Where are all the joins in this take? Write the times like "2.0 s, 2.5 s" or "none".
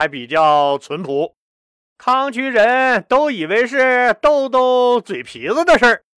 none